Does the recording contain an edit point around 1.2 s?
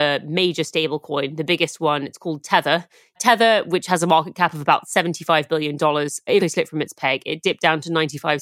no; 2 cuts; at 3.1 s, 6.4 s

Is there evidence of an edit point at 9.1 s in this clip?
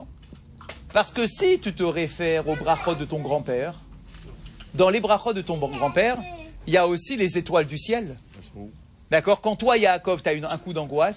yes; 1 cut; at 9.1 s

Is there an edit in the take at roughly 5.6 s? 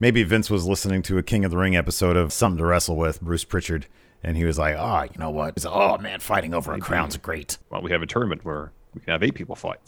yes; 3 cuts; at 2.3 s, 5.6 s, 7.6 s

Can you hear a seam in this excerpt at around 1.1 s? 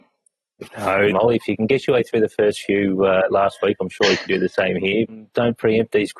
yes; 2 cuts; at 1.1 s, 5.1 s

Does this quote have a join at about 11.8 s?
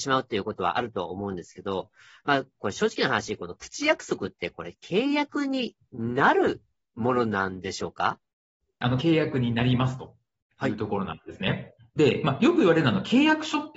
yes; 2 cuts; at 9.0 s, 11.8 s

